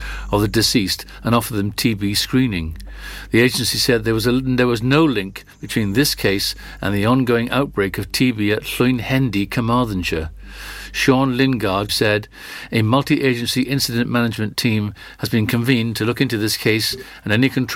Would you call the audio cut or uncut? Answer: cut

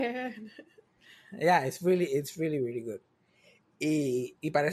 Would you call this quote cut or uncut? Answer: uncut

